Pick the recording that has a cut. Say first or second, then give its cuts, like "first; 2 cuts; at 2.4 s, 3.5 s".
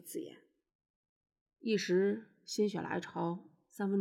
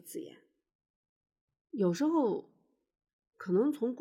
first; 1 cut; at 1.5 s